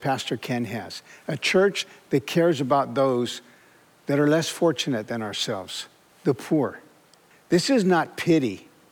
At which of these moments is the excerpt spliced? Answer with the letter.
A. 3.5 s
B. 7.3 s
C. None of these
B